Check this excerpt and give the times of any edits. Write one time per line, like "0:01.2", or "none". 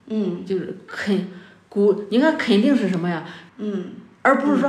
0:03.5